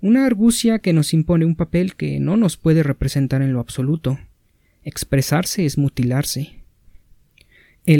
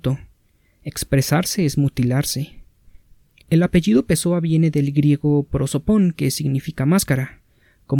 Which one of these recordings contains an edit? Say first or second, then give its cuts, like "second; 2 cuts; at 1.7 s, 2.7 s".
second; 1 cut; at 3.4 s